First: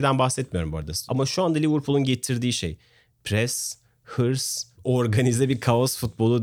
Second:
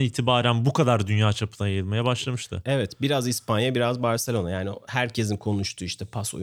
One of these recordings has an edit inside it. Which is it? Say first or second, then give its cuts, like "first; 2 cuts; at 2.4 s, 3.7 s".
first; 1 cut; at 1.1 s